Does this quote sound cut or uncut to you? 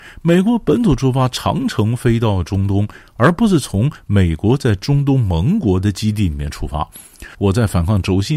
cut